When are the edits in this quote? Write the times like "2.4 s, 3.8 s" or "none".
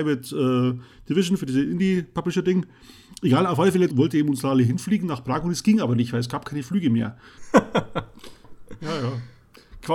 3.9 s, 7.4 s